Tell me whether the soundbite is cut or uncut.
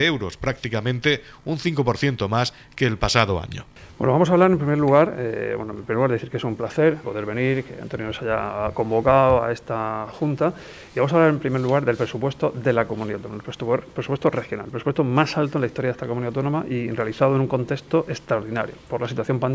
cut